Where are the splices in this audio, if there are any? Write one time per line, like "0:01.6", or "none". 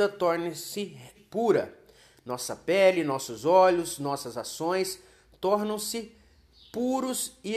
0:01.1